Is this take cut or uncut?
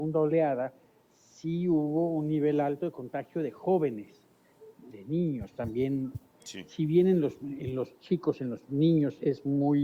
cut